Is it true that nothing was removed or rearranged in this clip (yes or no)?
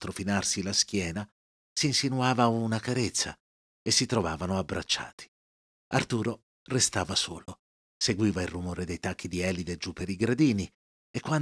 no